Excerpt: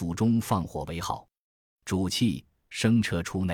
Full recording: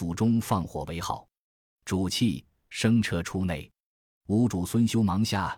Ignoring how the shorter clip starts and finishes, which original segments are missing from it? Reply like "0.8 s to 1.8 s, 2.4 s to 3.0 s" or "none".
none